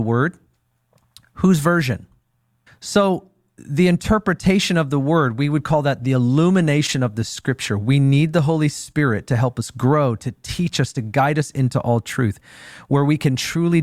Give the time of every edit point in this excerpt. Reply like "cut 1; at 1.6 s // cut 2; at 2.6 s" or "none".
cut 1; at 2.7 s